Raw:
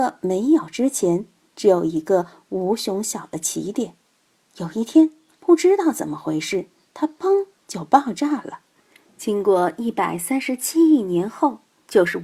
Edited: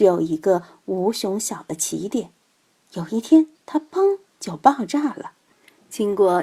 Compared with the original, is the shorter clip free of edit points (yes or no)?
no